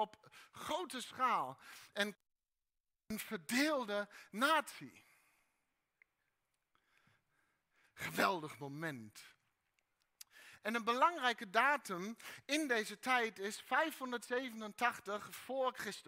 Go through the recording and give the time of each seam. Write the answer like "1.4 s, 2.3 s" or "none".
7.8 s, 10.6 s